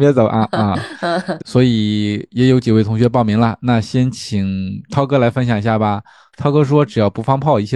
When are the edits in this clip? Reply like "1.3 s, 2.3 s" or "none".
1.4 s